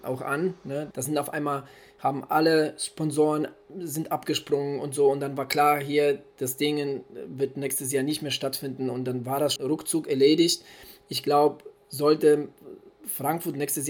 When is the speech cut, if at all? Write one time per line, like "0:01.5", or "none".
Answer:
0:00.9
0:09.6